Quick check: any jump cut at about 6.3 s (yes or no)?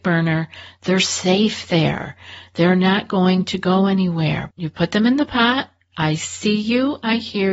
no